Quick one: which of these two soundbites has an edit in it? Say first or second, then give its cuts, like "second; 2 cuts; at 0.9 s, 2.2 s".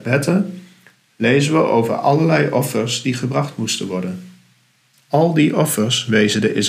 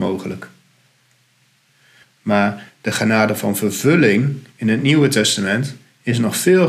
second; 1 cut; at 2.0 s